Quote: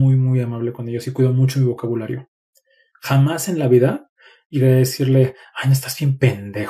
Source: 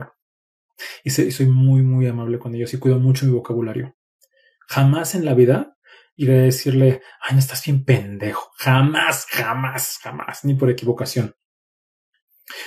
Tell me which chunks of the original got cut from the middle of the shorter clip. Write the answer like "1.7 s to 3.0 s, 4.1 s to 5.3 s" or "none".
none